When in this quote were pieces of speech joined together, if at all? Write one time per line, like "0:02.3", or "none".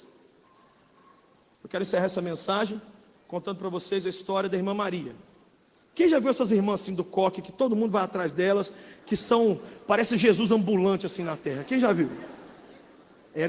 0:05.9